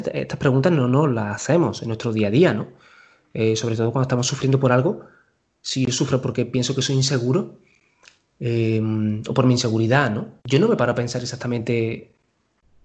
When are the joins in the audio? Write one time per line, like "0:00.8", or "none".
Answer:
0:10.4